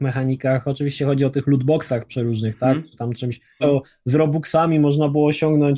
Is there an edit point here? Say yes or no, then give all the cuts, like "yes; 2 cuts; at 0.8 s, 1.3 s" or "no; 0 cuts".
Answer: yes; 1 cut; at 3.6 s